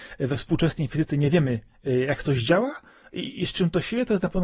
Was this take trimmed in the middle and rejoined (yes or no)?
no